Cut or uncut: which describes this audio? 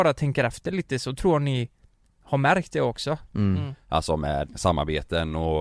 cut